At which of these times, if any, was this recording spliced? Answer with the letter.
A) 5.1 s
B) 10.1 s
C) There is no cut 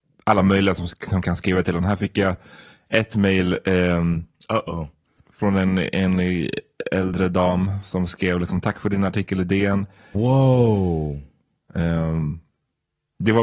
B